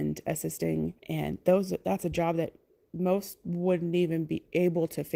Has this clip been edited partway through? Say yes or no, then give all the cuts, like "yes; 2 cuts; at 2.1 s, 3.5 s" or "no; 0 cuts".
yes; 1 cut; at 1.0 s